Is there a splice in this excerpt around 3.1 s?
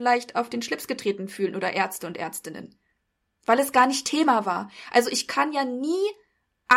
no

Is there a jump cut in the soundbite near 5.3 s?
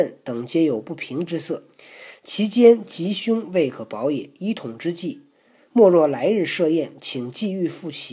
no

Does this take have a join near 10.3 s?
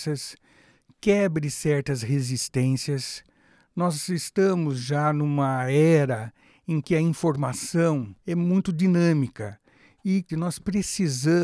yes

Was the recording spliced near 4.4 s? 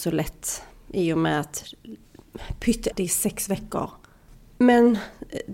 no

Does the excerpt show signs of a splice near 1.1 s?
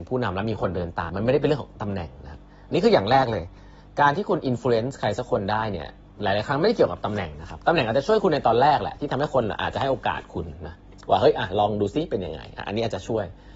yes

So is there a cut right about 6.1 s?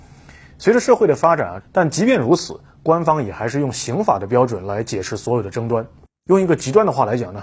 no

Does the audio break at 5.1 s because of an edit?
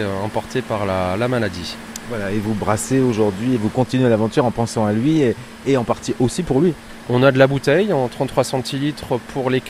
no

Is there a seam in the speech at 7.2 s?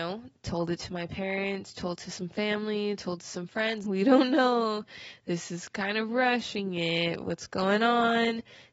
no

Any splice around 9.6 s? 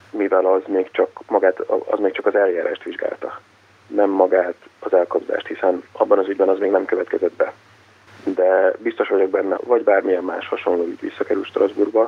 yes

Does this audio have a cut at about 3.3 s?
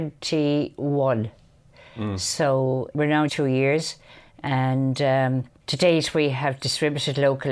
yes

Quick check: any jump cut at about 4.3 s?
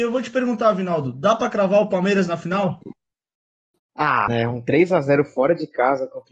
yes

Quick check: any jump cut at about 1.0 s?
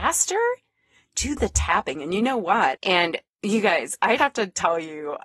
no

